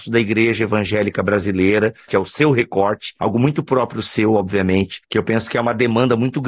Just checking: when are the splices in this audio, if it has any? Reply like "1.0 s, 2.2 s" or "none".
2.1 s, 5.0 s